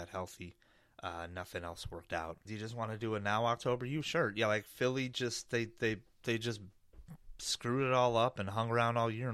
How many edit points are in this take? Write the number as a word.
one